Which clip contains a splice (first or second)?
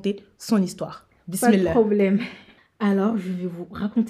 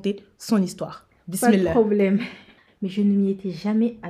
second